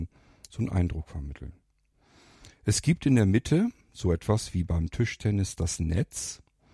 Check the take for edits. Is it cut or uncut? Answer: uncut